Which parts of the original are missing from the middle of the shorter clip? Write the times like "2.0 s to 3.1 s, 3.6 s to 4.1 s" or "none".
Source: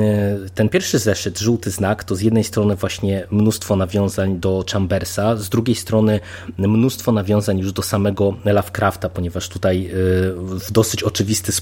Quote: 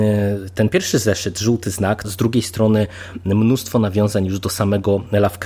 2.0 s to 5.4 s

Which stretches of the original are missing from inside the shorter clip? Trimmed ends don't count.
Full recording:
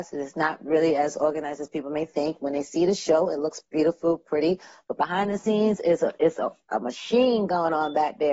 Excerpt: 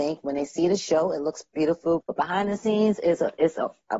4.2 s to 4.8 s

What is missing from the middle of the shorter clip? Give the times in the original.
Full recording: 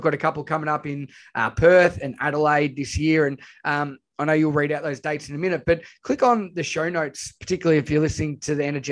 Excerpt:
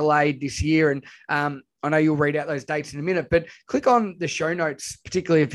none

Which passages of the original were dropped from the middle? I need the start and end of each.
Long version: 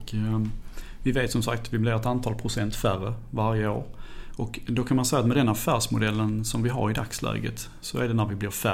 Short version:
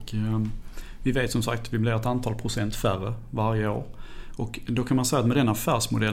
none

